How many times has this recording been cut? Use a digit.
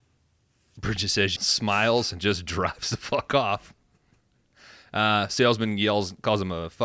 1